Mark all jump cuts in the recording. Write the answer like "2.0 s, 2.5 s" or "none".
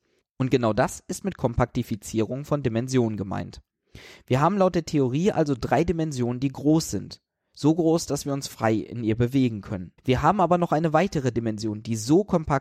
10.0 s